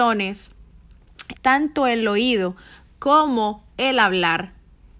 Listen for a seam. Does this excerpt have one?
yes; 1 cut; at 1.3 s

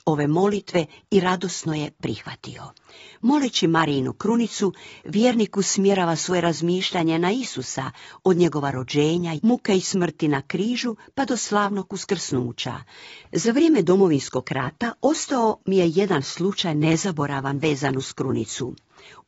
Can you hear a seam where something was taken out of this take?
yes; 2 cuts; at 9.4 s, 13.2 s

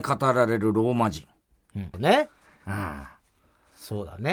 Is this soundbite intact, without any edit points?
no; 1 cut; at 1.9 s

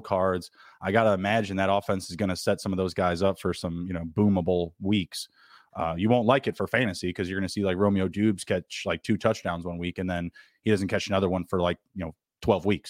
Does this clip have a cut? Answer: no; 0 cuts

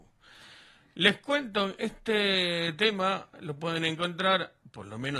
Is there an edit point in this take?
yes; 1 cut; at 3.3 s

